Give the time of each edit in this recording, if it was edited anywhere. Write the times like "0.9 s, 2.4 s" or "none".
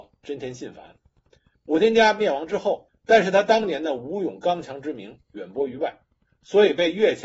1.5 s, 2.9 s